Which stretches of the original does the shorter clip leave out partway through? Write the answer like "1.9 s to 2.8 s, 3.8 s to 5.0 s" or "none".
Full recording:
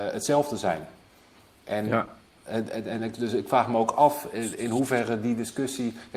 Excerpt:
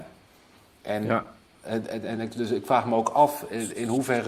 none

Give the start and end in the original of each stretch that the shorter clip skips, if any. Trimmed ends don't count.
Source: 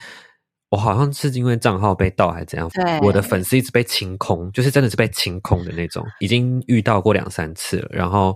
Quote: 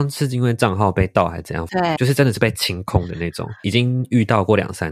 3.0 s to 4.5 s

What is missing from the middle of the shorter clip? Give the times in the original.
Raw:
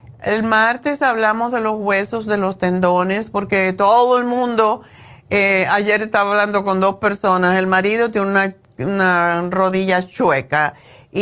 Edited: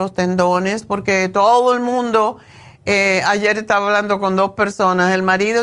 none

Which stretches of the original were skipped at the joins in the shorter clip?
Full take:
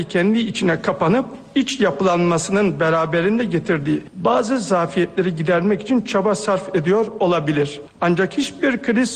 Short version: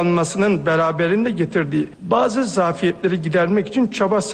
none

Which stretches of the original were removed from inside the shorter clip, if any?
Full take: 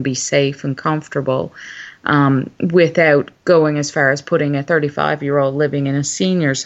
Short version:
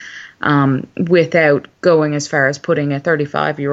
none

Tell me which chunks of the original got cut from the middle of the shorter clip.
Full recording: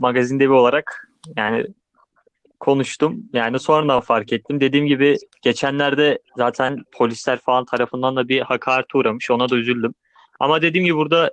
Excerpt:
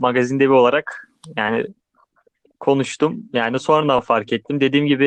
none

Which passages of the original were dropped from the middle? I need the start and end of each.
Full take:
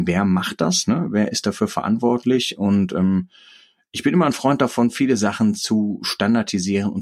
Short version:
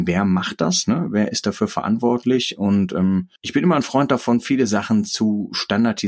3.4 s to 3.9 s

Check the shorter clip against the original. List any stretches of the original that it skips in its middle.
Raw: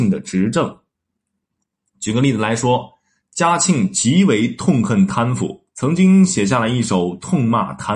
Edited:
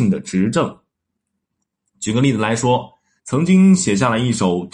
3.2 s to 5.7 s

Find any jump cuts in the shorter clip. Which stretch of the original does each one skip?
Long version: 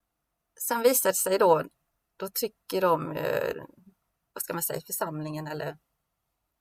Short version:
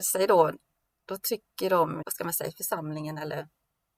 3.1 s to 4.3 s

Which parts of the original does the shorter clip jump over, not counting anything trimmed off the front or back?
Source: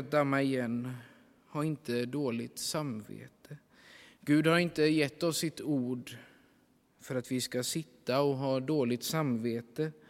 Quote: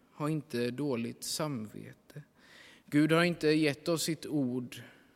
none

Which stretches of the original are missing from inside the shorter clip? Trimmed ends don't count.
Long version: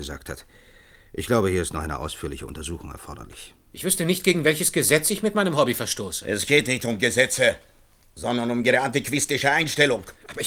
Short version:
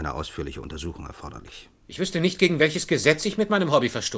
none

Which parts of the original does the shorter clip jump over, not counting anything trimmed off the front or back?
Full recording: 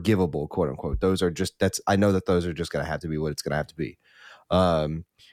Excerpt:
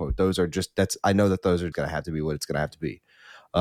2.6 s to 2.7 s

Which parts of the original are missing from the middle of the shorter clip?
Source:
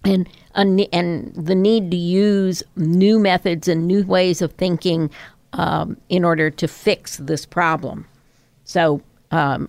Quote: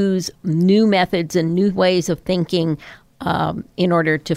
none

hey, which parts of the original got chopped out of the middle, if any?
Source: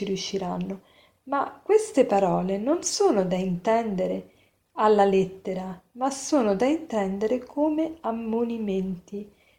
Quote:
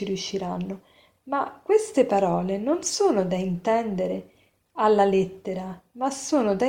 none

